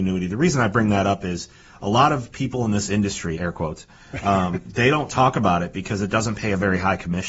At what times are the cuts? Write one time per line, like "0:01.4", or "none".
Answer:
0:03.3